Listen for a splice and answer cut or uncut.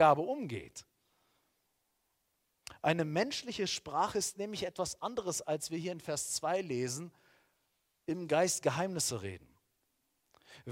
uncut